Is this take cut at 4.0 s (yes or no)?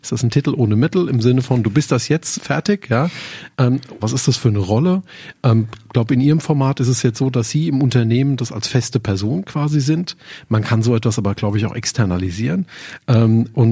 yes